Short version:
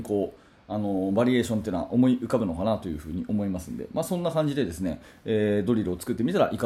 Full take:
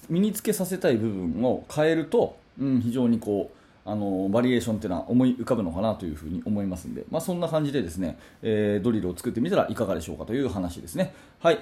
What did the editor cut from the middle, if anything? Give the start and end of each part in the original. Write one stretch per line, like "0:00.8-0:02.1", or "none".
none